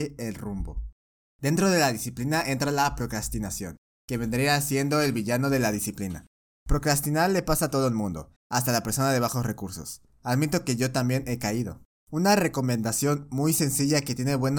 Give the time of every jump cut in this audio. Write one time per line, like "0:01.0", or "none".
0:08.4

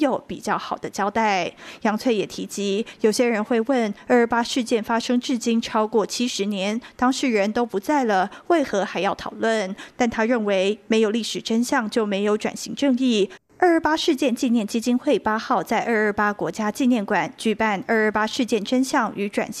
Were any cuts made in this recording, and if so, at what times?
0:13.4

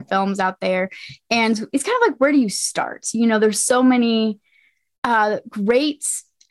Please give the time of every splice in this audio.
none

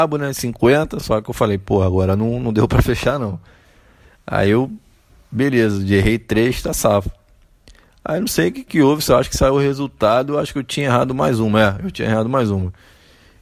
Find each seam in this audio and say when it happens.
none

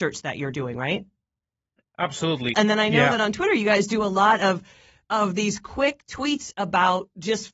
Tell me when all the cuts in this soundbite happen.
0:02.5

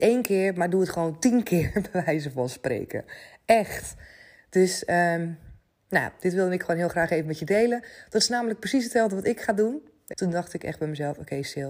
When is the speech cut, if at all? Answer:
0:10.1

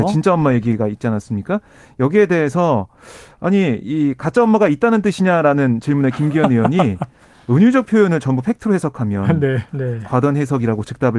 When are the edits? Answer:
0:09.7

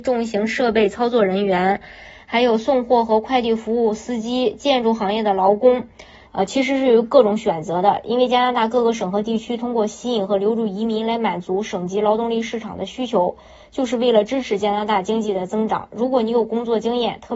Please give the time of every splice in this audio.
0:06.3

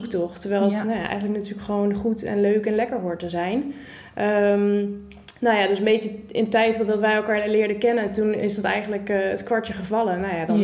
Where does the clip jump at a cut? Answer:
none

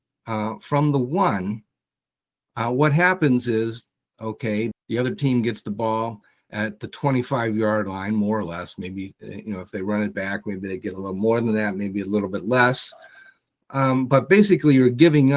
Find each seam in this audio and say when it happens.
0:04.7

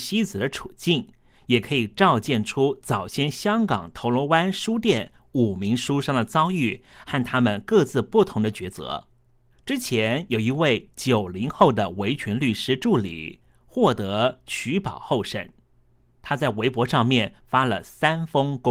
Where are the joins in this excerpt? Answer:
0:09.5

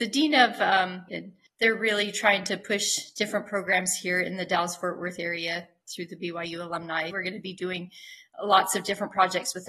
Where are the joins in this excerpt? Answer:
0:01.1
0:07.1

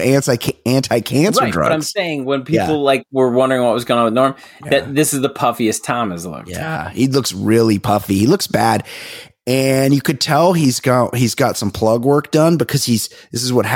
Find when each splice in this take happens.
none

